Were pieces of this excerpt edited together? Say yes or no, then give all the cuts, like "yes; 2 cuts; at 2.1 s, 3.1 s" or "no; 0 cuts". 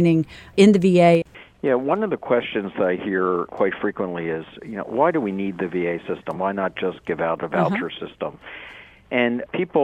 no; 0 cuts